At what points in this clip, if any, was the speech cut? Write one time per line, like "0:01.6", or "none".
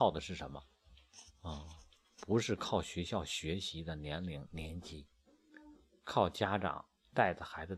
none